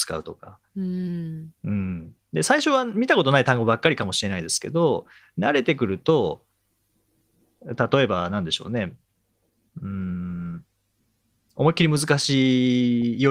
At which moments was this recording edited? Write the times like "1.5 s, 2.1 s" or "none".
none